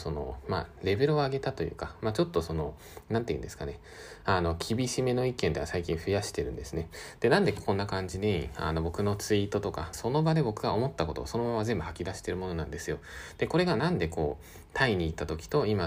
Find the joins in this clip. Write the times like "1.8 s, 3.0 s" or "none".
9.9 s